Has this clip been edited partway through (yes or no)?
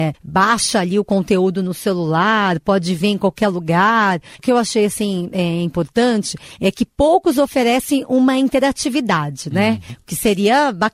no